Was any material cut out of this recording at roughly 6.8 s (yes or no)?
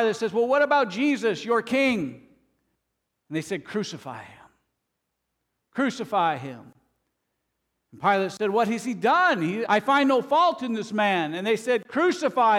no